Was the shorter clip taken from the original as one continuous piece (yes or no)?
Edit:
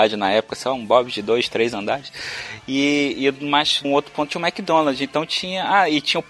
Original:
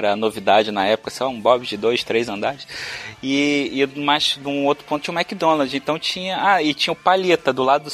no